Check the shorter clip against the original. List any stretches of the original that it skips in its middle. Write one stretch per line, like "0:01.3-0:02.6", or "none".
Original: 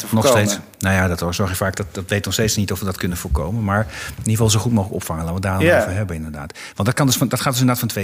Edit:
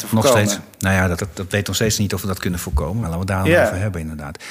0:01.2-0:01.7
0:03.6-0:05.2